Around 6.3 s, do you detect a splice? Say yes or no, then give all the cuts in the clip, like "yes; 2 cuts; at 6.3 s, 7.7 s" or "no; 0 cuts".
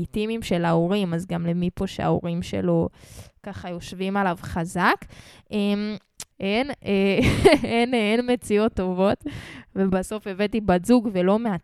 yes; 1 cut; at 6.3 s